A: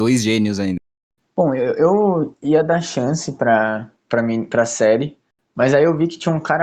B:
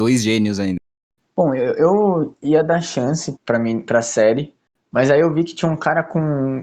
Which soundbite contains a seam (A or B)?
B